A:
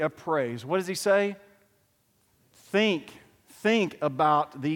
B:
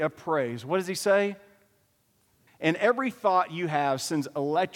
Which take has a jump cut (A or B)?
B